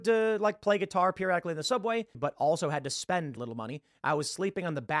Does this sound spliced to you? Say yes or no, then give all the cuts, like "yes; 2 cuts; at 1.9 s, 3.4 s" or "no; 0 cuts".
yes; 2 cuts; at 2.1 s, 3.4 s